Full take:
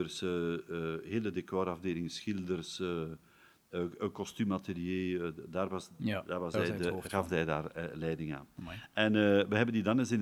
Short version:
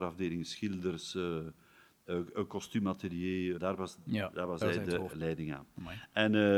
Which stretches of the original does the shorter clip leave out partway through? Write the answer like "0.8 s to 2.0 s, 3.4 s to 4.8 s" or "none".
5.2 s to 5.5 s, 7.0 s to 7.9 s